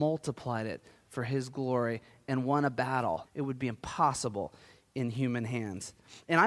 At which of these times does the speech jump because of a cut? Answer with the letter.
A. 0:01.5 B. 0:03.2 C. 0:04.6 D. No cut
B